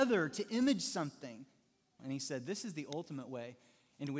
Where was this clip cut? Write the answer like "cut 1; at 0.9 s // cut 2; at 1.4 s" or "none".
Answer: cut 1; at 2.0 s